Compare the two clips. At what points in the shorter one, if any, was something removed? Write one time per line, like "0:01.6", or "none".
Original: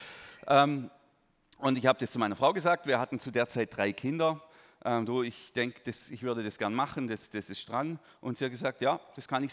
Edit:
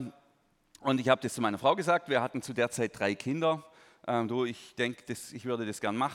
none